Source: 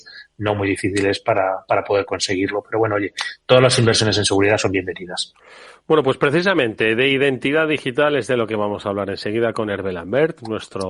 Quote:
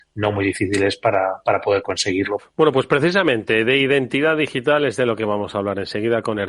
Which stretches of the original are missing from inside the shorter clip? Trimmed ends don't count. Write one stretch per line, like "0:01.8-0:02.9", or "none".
0:02.6-0:05.7